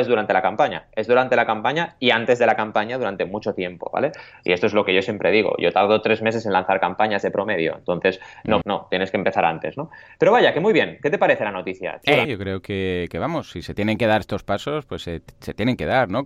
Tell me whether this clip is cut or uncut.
cut